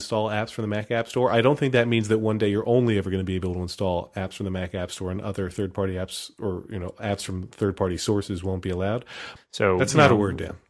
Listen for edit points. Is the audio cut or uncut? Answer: cut